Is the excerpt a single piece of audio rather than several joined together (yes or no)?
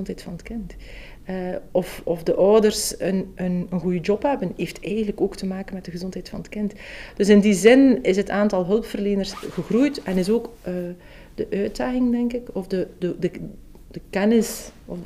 yes